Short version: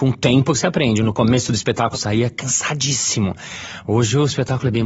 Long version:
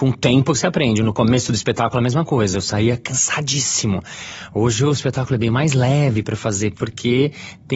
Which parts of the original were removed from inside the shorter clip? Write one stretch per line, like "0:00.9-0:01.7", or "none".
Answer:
0:01.9-0:02.6